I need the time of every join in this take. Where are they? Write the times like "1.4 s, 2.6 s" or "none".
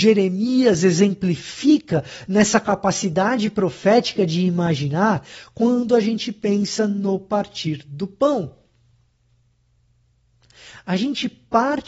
none

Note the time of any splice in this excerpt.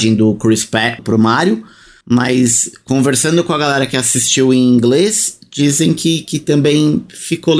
1.0 s

